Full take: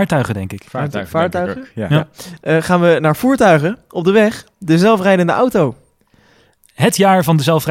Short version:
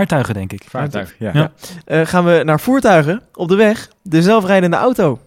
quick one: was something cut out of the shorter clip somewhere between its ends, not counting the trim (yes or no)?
yes